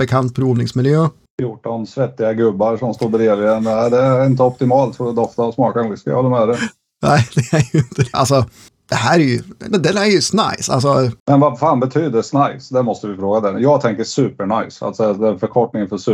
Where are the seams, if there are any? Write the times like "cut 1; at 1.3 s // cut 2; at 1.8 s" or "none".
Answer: cut 1; at 8.1 s